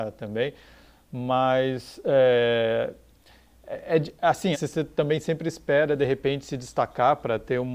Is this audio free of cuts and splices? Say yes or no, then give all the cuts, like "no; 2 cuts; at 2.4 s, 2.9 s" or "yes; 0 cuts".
no; 1 cut; at 4.5 s